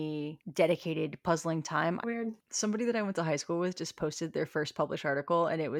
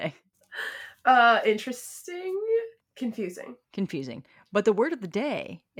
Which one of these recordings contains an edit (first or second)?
first